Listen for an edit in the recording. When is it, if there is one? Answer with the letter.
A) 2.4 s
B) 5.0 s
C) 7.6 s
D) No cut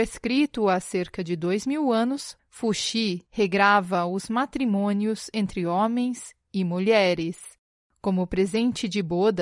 A